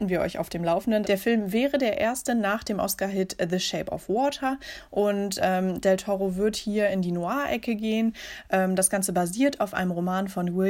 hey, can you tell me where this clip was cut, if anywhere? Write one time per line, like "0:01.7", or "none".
0:01.0

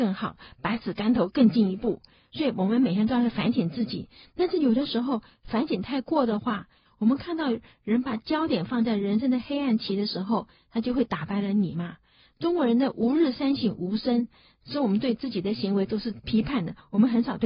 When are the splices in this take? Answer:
0:06.9

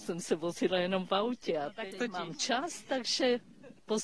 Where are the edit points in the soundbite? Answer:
0:01.9

